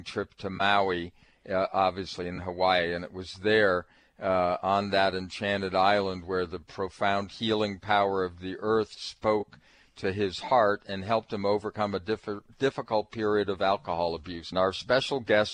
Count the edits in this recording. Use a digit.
1